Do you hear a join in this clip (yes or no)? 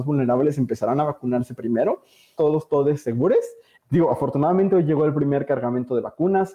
yes